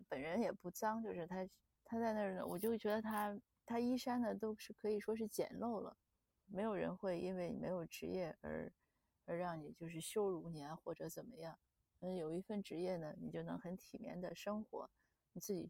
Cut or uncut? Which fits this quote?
cut